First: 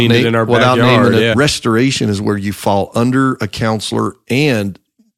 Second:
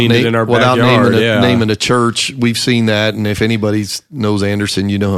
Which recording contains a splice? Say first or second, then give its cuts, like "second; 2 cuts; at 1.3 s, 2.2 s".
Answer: first; 1 cut; at 1.3 s